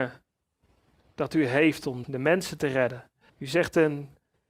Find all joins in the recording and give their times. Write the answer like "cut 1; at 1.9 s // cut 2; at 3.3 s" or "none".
cut 1; at 2.0 s // cut 2; at 3.3 s